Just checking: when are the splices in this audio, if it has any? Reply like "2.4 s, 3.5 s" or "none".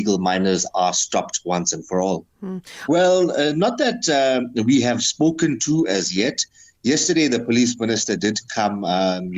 2.9 s